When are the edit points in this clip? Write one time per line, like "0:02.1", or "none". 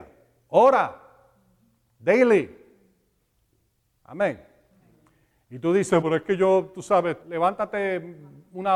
0:06.0
0:07.2